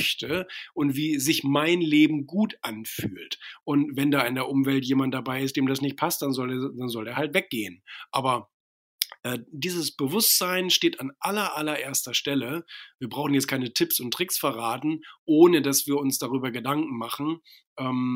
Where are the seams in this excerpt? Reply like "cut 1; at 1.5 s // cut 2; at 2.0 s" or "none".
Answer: cut 1; at 3.6 s